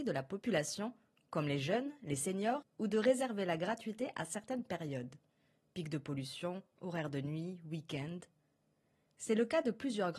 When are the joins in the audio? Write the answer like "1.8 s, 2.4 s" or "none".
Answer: 2.6 s